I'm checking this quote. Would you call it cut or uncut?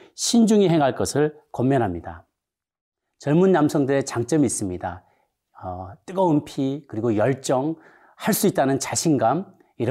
uncut